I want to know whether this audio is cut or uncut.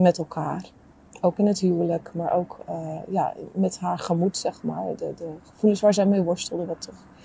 uncut